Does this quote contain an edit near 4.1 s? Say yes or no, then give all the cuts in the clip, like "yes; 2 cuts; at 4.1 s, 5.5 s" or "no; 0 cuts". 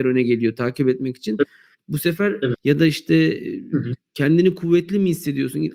no; 1 cut; at 2.5 s